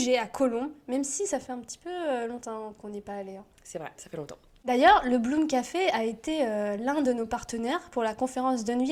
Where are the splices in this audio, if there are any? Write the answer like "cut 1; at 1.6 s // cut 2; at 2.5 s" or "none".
cut 1; at 3.9 s